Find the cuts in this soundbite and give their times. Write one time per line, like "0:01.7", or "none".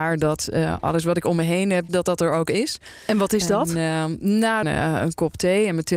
0:01.9
0:04.6